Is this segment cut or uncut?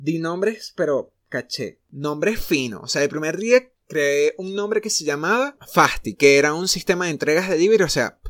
uncut